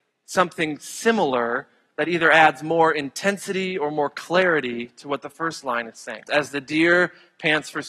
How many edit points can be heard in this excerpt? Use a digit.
1